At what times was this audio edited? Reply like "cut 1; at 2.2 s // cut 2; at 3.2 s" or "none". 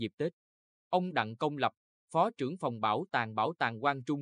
none

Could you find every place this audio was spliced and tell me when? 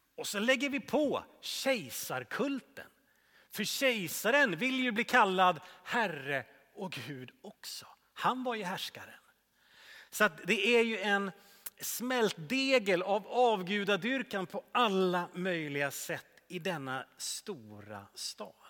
none

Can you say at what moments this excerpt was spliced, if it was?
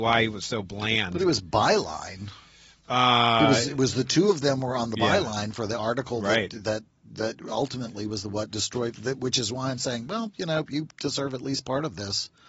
none

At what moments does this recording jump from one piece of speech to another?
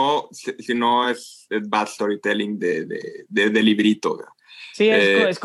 none

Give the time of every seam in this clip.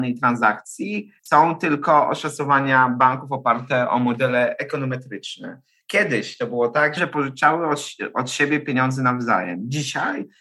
cut 1; at 1.2 s // cut 2; at 5.8 s // cut 3; at 7.0 s

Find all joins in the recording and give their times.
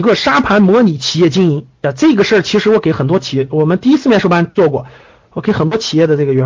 cut 1; at 1.7 s

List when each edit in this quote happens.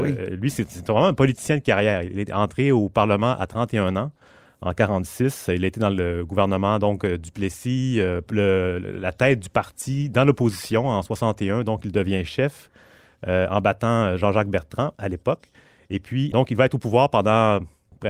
cut 1; at 8.3 s // cut 2; at 16.3 s

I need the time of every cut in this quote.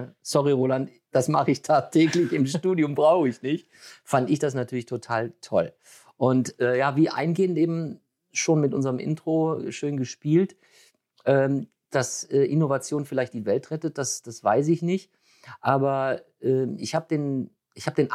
none

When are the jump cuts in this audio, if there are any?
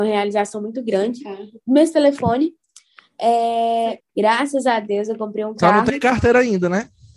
cut 1; at 1.6 s // cut 2; at 4.0 s

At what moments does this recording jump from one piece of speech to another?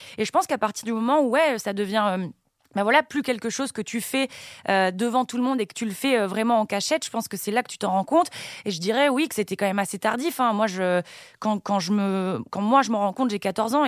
none

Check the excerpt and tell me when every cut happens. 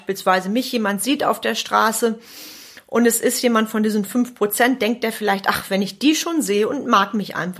none

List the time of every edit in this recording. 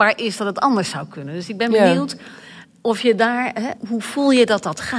cut 1; at 3.8 s

